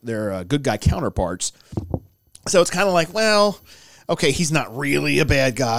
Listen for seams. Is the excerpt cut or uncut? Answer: uncut